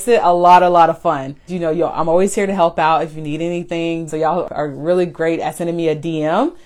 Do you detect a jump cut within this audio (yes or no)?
yes